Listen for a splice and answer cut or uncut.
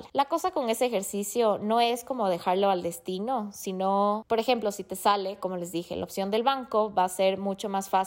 uncut